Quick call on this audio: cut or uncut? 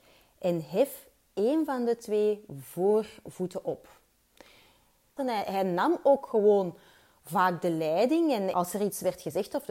cut